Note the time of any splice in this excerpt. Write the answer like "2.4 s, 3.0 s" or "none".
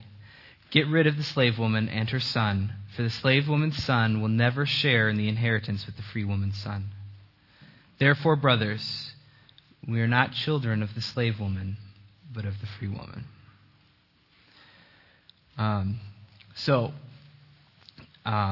none